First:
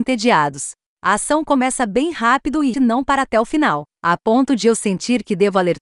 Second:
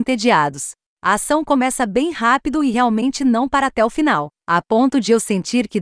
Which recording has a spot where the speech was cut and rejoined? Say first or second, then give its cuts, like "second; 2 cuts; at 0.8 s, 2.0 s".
first; 1 cut; at 2.7 s